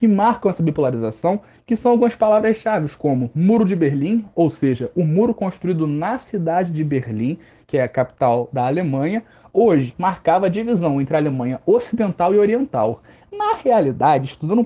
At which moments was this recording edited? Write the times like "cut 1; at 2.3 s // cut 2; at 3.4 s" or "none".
cut 1; at 9.9 s